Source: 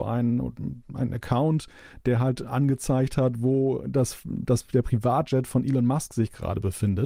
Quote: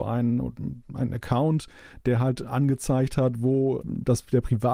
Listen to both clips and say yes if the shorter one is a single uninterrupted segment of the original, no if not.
no